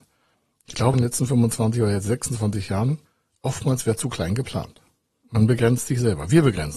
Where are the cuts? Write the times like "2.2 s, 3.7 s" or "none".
0.9 s